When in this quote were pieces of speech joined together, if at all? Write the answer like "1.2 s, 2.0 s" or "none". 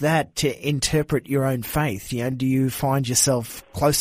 none